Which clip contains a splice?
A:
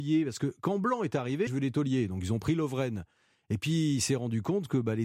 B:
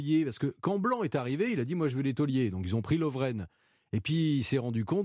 A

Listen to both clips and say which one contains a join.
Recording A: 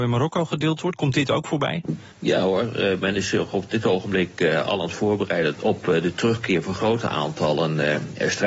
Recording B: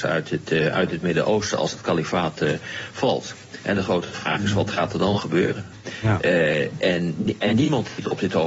A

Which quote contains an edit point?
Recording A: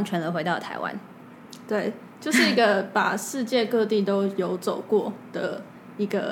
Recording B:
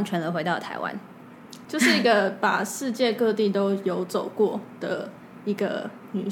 B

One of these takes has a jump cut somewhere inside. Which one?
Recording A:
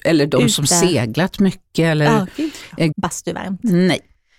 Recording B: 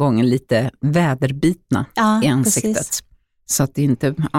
A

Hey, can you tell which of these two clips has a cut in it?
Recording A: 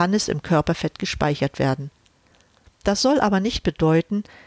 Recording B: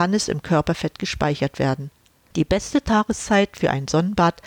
B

